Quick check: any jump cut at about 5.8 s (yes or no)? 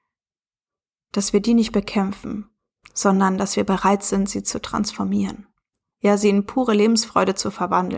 no